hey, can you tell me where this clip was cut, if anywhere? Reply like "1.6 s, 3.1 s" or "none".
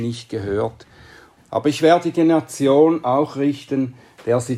1.4 s